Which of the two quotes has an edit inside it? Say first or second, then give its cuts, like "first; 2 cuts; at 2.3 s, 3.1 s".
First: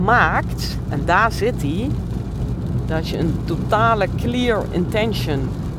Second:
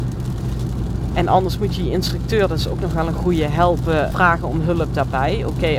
second; 1 cut; at 4.1 s